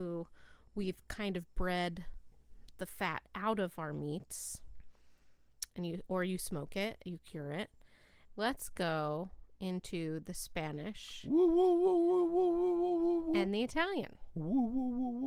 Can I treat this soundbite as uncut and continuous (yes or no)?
no